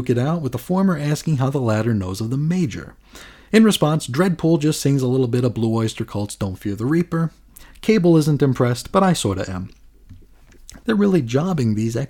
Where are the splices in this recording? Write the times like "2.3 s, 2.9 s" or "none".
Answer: 10.8 s